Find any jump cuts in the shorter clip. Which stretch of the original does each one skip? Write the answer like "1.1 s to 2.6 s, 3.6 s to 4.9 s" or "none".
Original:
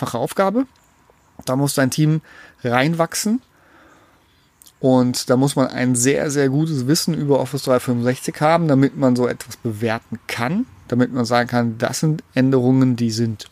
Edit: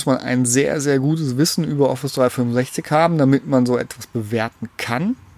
none